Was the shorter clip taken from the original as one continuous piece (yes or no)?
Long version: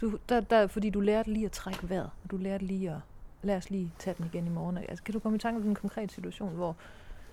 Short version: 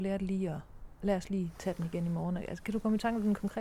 yes